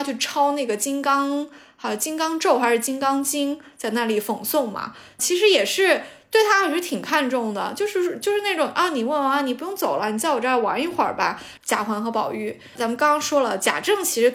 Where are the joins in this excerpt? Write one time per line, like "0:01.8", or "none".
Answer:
0:11.6
0:12.8